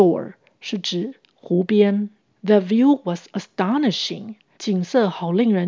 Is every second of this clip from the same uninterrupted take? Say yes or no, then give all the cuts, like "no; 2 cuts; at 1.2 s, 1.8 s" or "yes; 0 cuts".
yes; 0 cuts